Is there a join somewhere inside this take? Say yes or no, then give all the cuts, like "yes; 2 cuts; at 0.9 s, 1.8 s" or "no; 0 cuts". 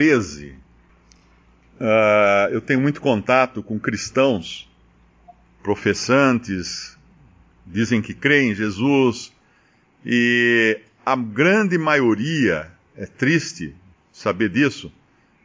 no; 0 cuts